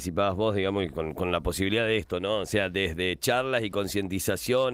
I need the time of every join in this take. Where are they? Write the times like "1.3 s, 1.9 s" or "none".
none